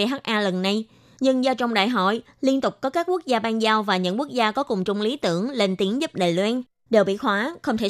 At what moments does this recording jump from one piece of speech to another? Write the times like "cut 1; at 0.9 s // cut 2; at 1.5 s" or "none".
cut 1; at 6.9 s